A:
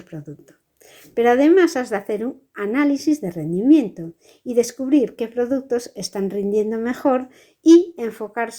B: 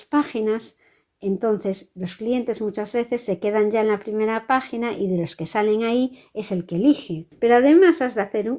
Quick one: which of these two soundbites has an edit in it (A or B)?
B